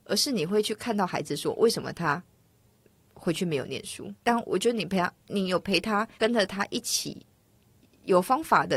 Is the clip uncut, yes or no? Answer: no